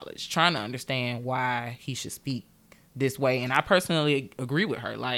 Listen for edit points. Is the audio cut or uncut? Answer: uncut